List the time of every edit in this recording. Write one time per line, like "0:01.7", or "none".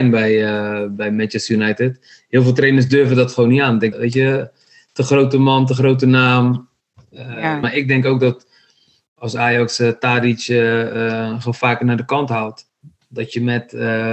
0:03.9
0:07.6